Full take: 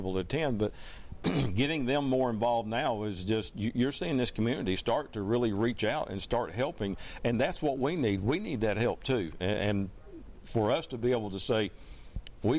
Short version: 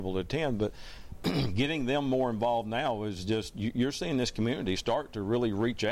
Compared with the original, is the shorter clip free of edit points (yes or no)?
yes